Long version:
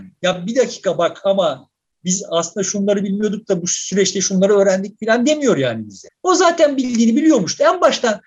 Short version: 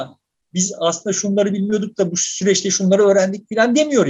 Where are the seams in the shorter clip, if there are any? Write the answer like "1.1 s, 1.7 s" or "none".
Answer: none